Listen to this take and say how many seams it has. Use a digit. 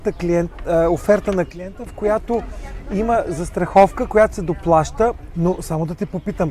1